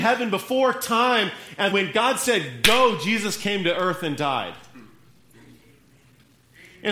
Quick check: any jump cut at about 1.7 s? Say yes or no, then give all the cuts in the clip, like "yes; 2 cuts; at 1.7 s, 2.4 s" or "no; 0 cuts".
yes; 1 cut; at 1.7 s